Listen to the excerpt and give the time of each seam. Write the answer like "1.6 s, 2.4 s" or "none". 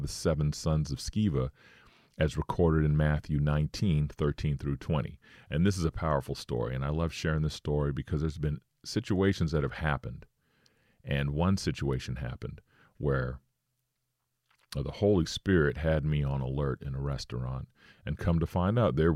none